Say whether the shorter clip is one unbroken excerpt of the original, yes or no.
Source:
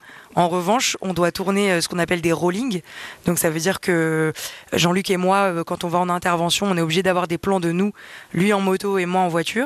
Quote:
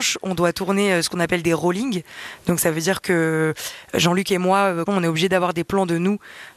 no